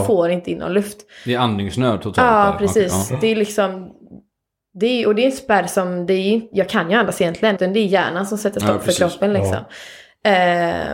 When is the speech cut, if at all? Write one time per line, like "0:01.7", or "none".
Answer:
0:07.6